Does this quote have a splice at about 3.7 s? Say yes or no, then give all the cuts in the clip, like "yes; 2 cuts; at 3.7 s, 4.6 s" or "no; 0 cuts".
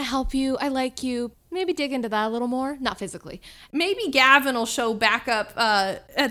yes; 2 cuts; at 1.3 s, 3.7 s